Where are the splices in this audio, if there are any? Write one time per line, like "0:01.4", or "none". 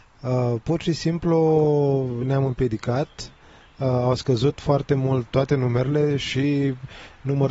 0:05.3